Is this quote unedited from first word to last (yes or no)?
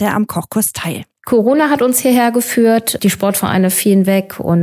no